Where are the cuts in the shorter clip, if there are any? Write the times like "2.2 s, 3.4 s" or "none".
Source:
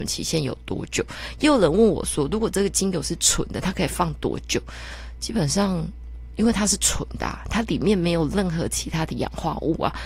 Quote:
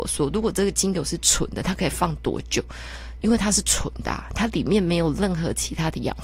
3.2 s